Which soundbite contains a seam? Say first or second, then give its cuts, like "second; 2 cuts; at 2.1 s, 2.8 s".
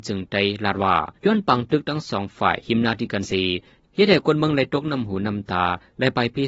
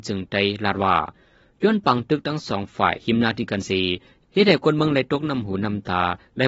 first; 1 cut; at 1.2 s